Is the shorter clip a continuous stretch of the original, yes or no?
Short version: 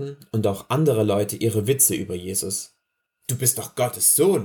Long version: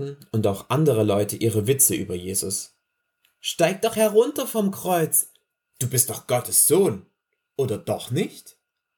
no